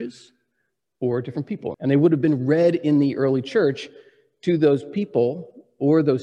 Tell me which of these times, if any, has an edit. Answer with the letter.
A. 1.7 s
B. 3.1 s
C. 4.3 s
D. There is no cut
A